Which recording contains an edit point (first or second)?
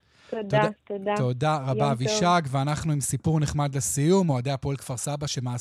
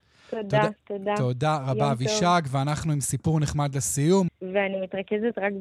second